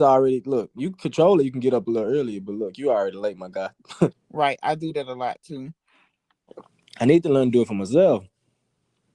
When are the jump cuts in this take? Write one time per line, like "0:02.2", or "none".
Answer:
0:04.1